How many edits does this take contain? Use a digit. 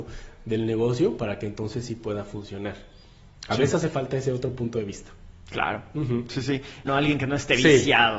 1